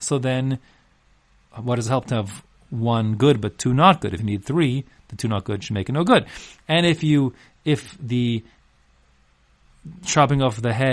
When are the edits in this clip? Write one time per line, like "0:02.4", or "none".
none